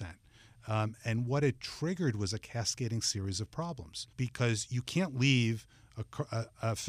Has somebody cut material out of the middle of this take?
yes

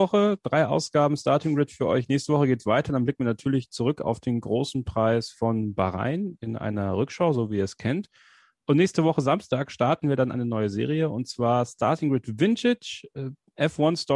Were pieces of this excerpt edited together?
no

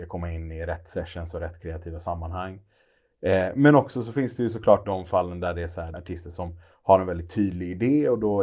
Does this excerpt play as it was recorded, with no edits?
no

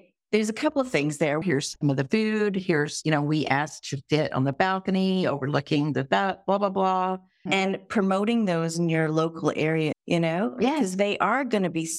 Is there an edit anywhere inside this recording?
yes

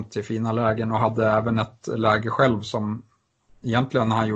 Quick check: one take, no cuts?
yes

